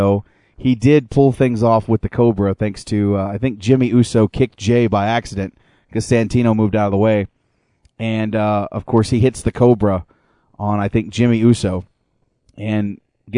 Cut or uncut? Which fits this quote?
uncut